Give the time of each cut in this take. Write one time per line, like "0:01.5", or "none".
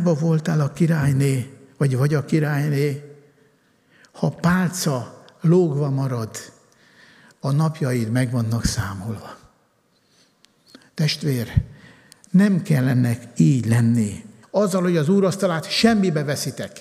0:14.4